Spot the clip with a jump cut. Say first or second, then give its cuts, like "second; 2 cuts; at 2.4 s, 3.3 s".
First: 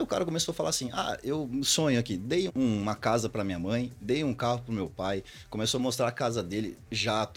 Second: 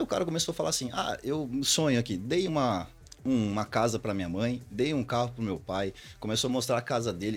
first; 1 cut; at 2.5 s